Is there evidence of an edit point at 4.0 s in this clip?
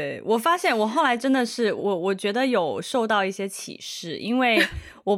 no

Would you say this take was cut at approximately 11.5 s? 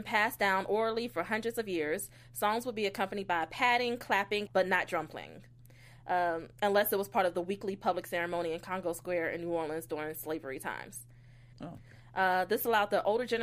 yes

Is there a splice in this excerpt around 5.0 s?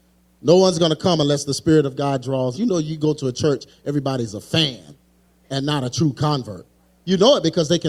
no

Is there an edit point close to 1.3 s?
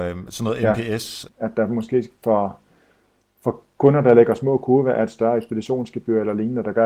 yes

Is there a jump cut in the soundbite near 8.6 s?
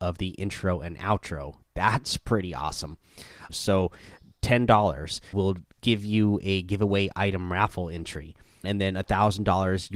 yes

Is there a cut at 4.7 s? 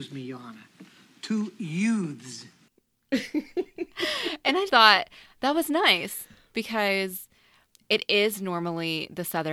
yes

